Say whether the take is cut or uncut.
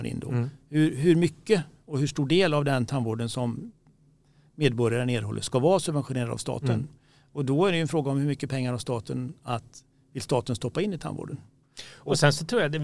uncut